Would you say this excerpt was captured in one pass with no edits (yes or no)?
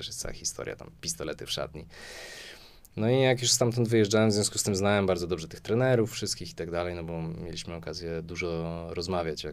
yes